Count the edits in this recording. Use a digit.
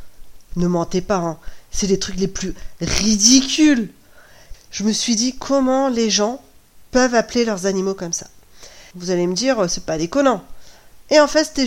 2